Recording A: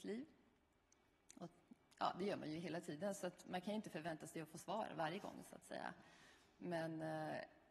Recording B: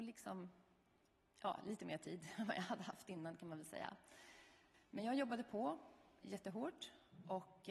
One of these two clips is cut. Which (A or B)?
B